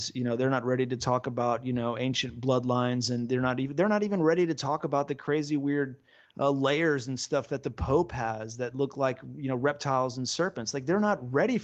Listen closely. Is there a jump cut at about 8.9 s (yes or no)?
no